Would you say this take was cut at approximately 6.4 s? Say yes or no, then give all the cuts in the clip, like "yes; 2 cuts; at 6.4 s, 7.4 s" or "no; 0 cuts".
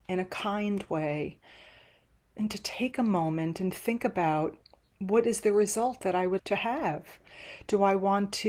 yes; 1 cut; at 6.4 s